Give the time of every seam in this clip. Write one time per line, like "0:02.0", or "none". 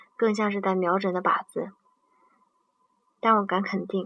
none